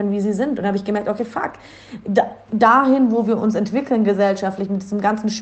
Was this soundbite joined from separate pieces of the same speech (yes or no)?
no